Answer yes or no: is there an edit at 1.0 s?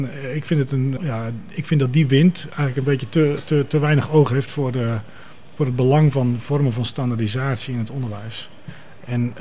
yes